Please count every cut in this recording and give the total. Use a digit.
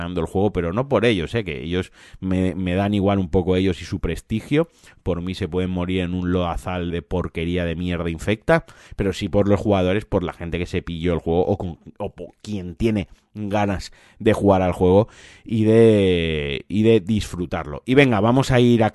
1